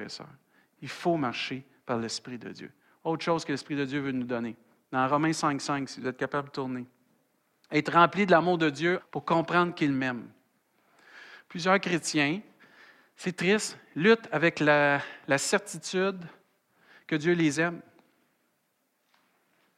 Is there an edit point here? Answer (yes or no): yes